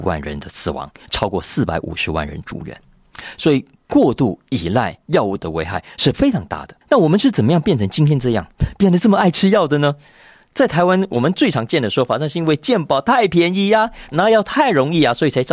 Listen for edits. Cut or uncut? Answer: cut